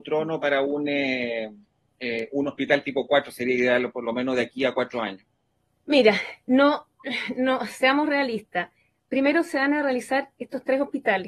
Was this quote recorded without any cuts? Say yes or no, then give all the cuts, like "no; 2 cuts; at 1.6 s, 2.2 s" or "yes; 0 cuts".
yes; 0 cuts